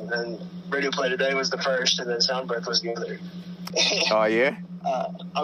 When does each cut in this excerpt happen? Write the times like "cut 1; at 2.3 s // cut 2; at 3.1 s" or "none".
cut 1; at 3.7 s